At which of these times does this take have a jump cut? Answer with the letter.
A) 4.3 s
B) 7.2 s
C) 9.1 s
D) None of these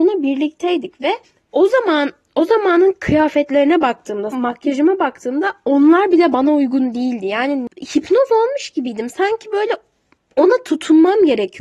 A